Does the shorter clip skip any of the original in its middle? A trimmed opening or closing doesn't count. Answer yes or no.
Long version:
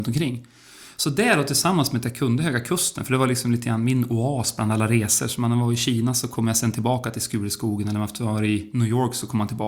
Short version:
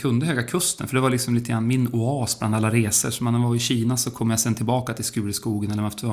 no